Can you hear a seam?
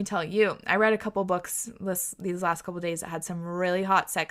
no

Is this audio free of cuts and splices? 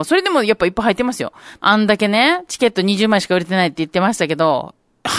no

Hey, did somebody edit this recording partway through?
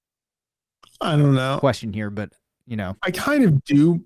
yes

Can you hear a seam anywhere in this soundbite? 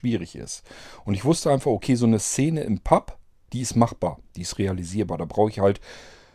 no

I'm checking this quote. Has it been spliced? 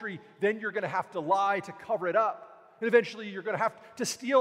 no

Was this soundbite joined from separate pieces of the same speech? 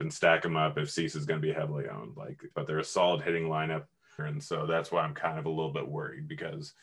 yes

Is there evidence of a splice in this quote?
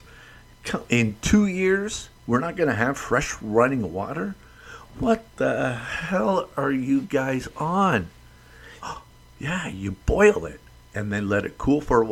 yes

